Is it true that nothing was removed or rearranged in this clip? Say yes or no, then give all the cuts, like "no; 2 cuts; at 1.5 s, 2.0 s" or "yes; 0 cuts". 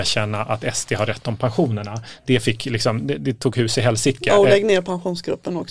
yes; 0 cuts